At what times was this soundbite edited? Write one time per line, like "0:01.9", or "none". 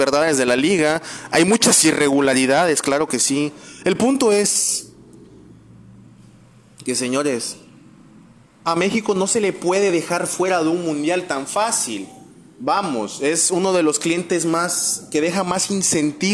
none